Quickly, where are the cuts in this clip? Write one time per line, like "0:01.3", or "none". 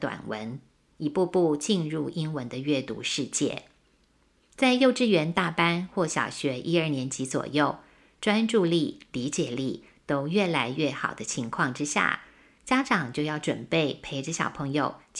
0:08.2